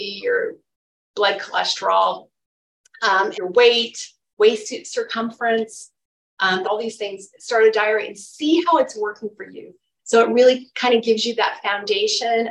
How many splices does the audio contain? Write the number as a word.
three